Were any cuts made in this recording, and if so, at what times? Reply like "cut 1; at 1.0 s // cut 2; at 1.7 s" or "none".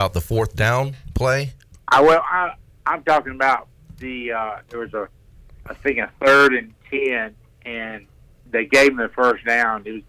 none